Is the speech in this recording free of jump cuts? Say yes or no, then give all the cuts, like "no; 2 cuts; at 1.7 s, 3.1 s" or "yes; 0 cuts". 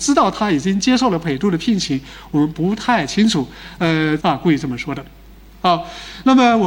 no; 1 cut; at 4.2 s